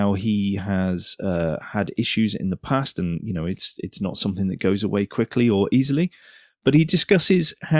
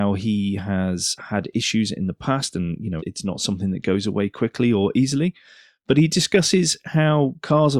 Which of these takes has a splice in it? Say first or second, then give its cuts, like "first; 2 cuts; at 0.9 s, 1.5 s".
second; 2 cuts; at 1.2 s, 3.0 s